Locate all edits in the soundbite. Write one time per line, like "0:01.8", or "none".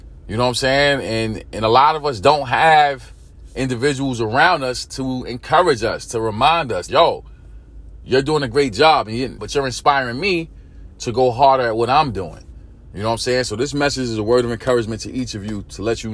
0:06.9
0:09.4

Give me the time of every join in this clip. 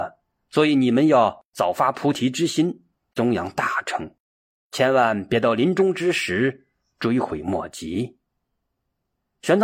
none

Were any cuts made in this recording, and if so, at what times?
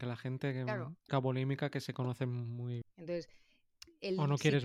0:01.1
0:02.8

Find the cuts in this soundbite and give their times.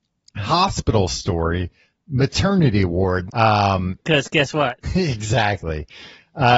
0:03.3
0:04.8

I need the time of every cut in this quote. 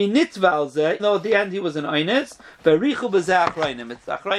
0:01.0

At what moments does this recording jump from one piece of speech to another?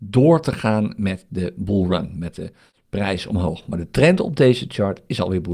none

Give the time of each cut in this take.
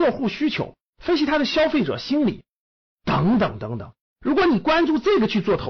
0:04.0

